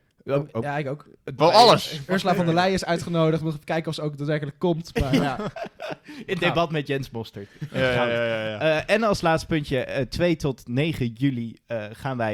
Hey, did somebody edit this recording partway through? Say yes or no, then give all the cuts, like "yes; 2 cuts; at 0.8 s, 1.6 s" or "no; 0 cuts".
yes; 1 cut; at 1.4 s